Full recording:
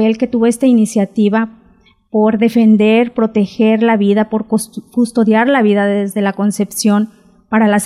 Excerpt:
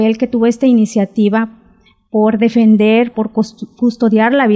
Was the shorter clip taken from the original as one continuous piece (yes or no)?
no